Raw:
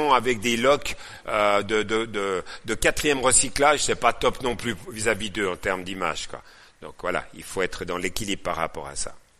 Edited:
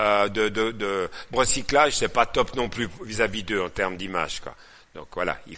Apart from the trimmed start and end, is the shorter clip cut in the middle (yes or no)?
yes